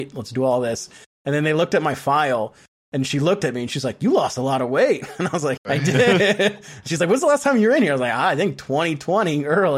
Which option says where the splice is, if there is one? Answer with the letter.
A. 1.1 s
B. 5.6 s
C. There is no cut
B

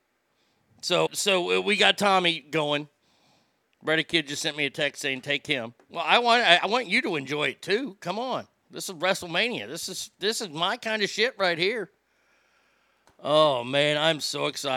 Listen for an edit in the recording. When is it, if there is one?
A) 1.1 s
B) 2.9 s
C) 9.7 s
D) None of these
A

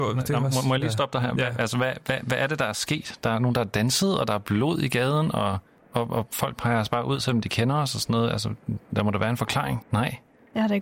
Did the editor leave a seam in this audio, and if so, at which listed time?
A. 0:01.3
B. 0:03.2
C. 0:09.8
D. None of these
C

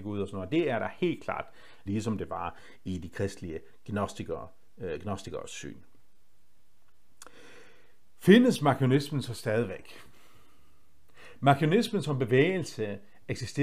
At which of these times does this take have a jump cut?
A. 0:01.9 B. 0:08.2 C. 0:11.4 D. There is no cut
A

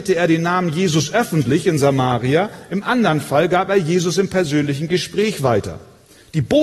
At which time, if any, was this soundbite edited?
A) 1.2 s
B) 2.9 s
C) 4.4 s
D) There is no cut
D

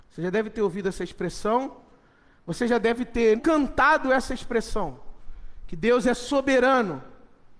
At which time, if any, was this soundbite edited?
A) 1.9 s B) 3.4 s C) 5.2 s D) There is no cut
B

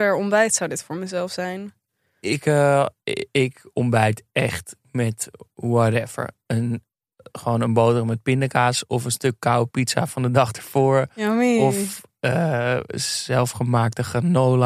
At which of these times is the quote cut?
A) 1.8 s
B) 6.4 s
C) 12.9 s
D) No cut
D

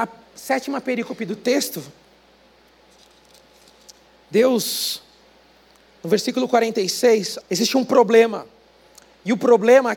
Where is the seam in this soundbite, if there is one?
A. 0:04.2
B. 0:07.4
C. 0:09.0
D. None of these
B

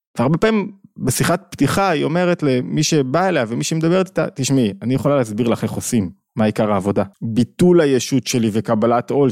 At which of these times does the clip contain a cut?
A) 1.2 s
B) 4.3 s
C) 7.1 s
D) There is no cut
C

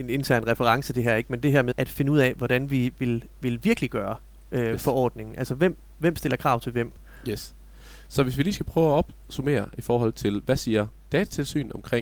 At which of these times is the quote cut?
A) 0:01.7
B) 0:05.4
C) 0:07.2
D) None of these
A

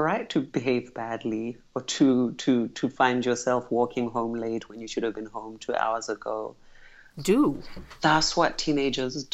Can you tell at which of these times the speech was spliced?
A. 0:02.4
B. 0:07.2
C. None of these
B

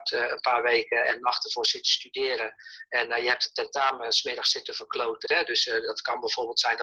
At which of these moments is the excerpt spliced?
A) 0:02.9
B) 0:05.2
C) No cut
B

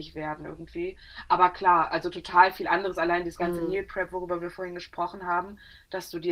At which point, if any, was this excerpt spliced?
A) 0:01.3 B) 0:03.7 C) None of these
C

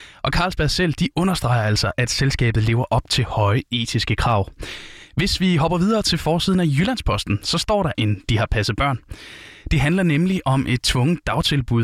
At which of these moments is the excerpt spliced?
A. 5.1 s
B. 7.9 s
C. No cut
B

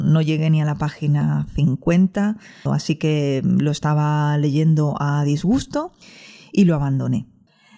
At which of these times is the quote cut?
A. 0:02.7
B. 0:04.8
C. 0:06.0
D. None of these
A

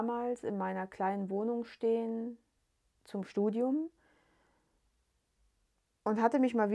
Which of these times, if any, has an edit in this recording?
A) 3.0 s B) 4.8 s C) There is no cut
C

